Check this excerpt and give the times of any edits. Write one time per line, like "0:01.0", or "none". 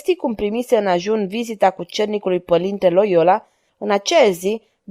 0:03.7